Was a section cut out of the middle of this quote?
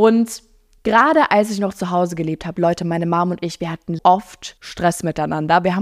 yes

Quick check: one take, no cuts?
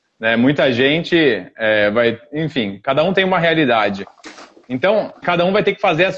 no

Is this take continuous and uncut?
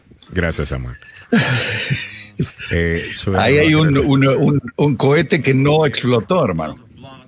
yes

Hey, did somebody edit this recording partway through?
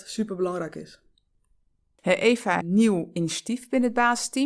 yes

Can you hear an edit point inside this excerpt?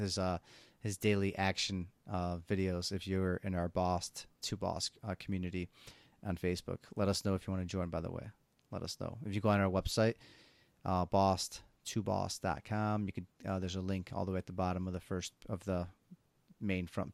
no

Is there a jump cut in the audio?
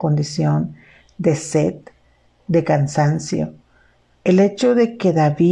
yes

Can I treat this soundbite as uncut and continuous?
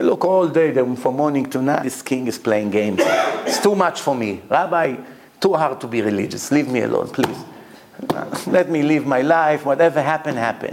no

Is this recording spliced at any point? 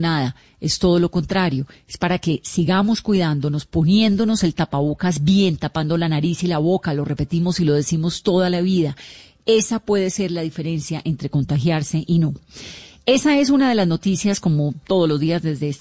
no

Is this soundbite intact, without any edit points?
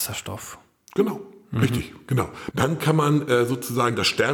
no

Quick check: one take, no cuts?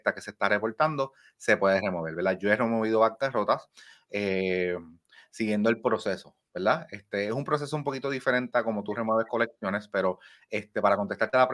yes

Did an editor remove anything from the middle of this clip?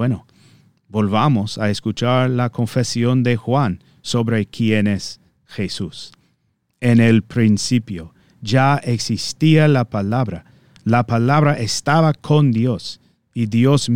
no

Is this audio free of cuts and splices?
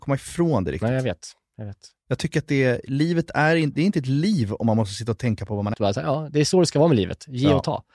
no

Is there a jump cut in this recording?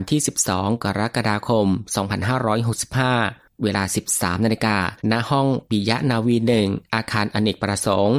yes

